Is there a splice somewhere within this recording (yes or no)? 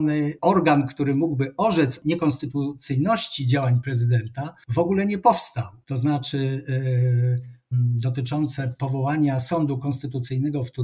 yes